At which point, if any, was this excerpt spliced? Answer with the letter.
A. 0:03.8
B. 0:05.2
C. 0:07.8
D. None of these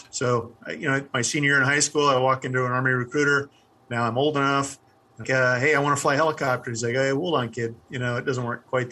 B